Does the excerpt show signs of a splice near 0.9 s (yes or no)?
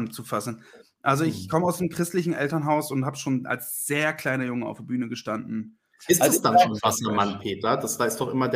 no